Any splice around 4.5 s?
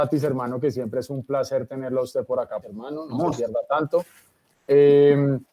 no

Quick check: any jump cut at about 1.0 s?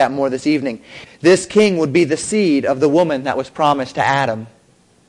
yes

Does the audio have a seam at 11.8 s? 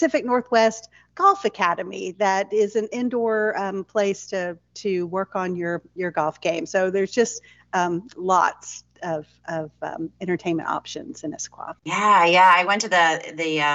yes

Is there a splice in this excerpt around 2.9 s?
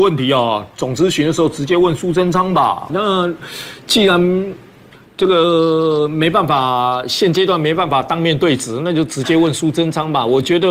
yes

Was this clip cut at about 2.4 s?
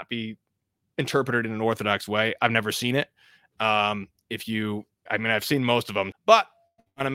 no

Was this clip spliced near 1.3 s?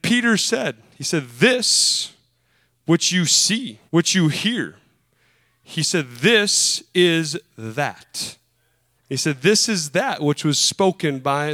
no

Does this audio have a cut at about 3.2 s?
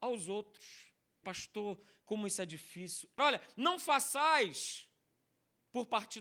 yes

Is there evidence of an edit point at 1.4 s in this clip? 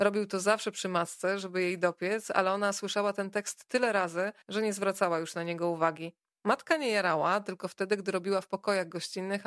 no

